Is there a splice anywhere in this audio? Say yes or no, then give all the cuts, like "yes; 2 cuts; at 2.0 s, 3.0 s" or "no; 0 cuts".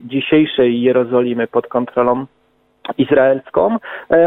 no; 0 cuts